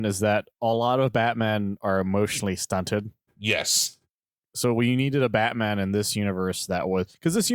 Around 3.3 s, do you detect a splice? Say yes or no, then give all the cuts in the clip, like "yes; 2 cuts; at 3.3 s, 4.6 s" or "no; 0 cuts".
yes; 1 cut; at 3.3 s